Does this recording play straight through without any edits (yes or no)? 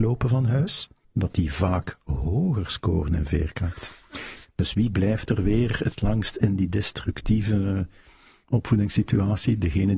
no